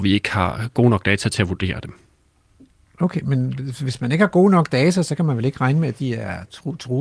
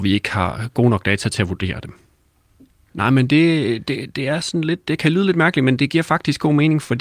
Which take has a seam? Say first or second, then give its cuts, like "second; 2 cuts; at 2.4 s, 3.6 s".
second; 2 cuts; at 2.9 s, 4.8 s